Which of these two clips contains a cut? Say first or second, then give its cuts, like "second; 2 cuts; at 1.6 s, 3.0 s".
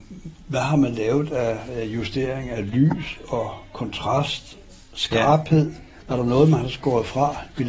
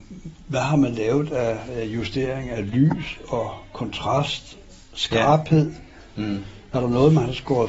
first; 1 cut; at 6.0 s